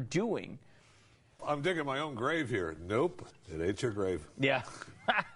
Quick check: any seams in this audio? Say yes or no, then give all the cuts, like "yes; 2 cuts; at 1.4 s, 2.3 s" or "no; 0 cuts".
yes; 1 cut; at 1.4 s